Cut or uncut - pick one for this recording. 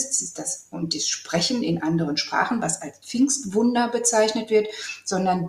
uncut